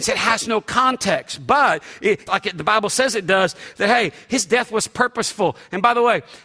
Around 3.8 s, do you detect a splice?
no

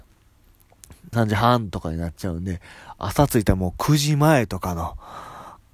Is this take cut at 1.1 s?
yes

